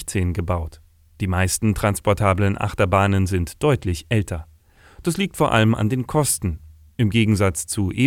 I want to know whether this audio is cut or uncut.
uncut